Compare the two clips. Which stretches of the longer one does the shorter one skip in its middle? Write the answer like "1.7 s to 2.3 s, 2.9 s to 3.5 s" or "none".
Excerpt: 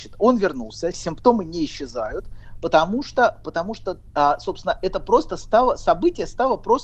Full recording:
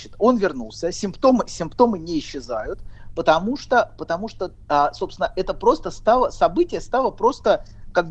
0.9 s to 1.5 s